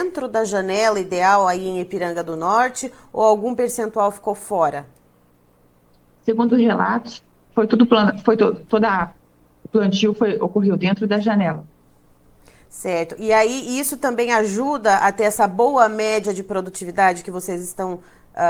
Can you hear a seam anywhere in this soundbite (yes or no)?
no